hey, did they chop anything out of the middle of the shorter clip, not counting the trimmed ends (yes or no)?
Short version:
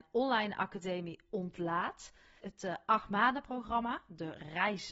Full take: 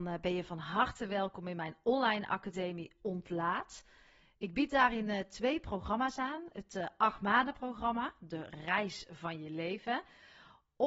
yes